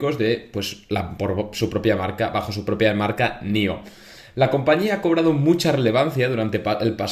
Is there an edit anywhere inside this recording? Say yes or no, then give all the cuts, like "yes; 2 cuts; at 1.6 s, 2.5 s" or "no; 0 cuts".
no; 0 cuts